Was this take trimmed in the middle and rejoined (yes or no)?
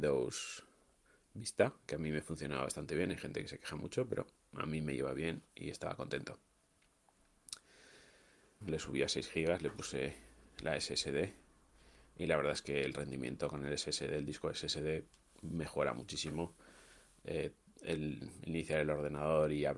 yes